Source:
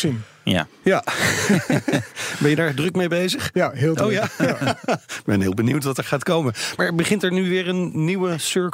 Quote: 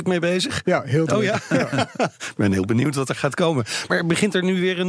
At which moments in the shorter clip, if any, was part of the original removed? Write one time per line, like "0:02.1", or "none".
none

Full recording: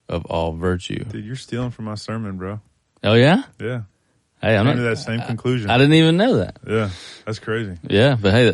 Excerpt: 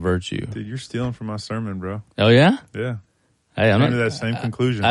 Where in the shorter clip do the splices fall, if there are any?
0:02.1

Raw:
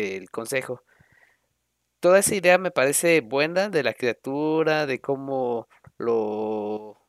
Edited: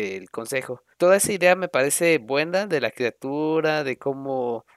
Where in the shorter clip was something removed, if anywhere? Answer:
0:00.9

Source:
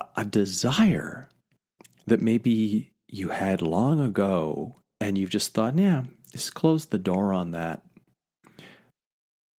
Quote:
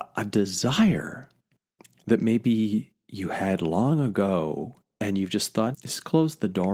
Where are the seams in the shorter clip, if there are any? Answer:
0:05.7

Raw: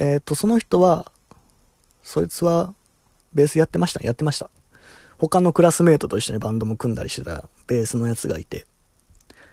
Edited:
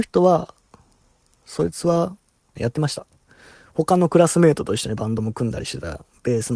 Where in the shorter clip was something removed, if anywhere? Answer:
0:02.5

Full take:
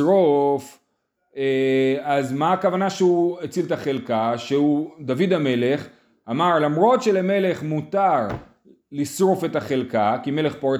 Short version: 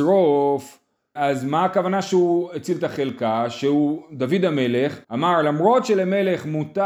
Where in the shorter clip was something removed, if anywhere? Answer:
0:01.2
0:05.0

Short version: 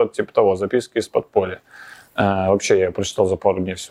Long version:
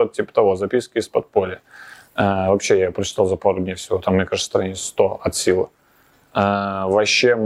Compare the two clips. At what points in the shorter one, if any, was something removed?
none

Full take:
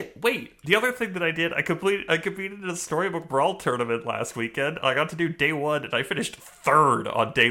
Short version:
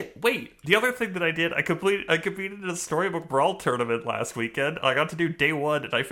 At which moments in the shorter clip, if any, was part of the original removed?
none

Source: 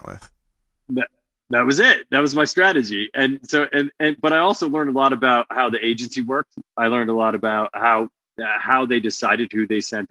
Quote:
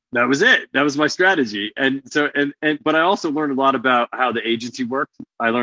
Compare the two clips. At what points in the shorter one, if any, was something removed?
none

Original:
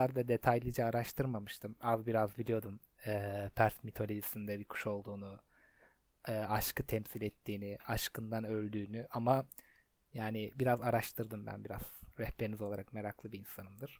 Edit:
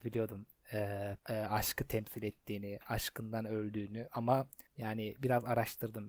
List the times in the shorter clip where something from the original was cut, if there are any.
0:01.2
0:04.7

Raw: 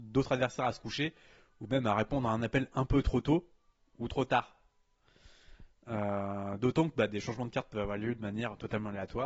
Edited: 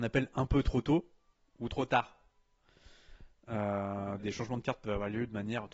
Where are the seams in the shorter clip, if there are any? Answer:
0:04.2

